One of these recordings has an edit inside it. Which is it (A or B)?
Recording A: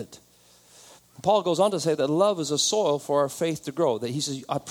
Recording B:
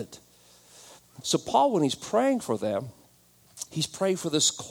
B